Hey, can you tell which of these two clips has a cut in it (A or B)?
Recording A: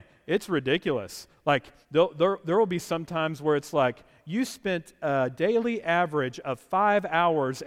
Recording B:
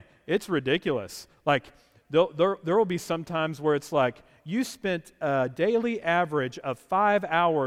A